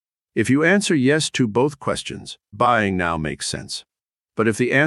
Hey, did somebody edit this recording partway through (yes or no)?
yes